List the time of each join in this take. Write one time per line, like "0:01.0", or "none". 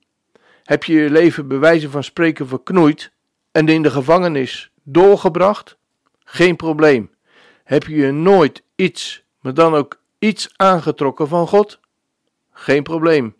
none

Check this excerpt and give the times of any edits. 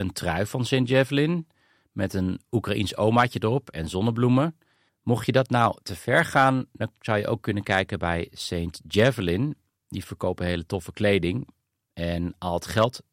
0:04.9

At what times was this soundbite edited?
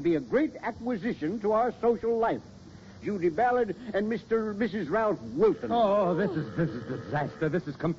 0:03.0

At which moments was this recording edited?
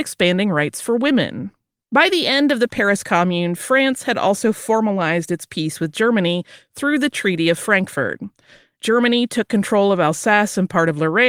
0:01.8

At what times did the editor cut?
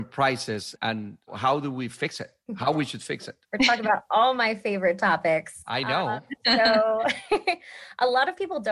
0:03.4

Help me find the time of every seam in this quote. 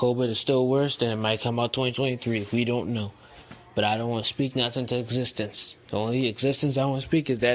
none

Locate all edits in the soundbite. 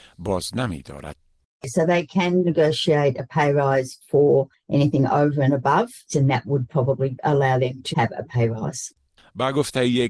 0:06.1
0:07.9

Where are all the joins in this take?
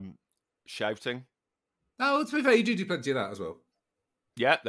none

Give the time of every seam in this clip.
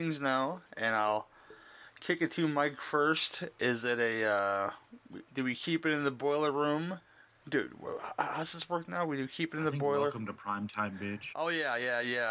0:11.3

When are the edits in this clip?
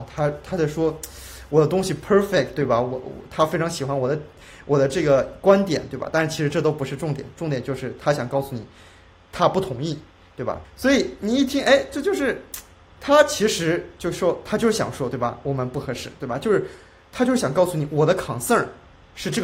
0:10.6

